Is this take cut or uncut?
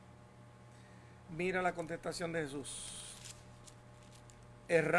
cut